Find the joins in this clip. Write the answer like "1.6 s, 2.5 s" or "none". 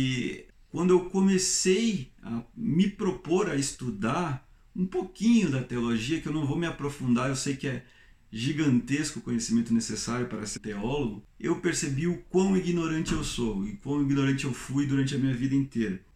10.6 s